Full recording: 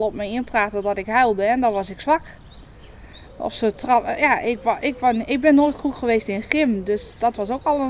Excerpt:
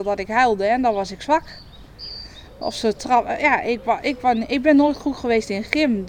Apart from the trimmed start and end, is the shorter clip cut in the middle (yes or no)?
no